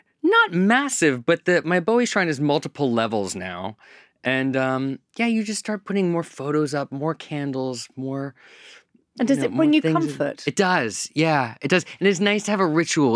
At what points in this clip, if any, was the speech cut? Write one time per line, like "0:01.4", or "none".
none